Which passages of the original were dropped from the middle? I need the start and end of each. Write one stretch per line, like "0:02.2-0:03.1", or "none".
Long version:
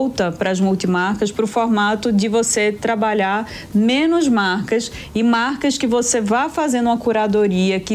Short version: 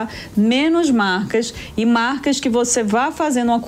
none